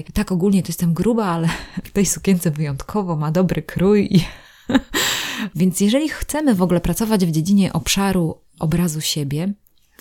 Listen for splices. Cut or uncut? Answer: cut